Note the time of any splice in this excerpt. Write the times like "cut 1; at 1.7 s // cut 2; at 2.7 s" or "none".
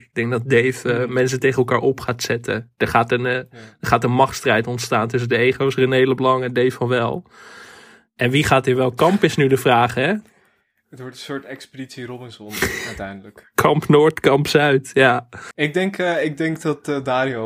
cut 1; at 15.5 s

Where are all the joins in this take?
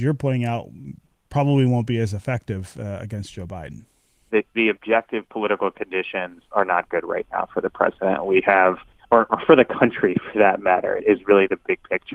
cut 1; at 4.3 s // cut 2; at 11.0 s

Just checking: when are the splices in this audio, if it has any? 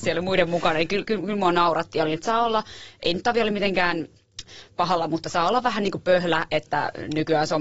none

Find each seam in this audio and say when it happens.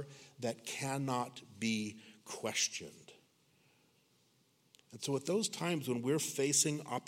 none

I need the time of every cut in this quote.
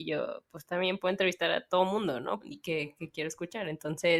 cut 1; at 2.4 s

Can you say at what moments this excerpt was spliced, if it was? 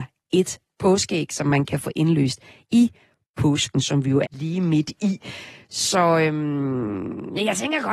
cut 1; at 4.2 s

